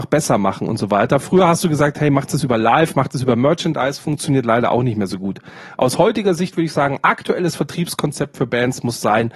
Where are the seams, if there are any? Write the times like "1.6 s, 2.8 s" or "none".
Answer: none